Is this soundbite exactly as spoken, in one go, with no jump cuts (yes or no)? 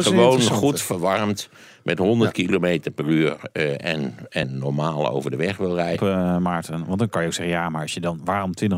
no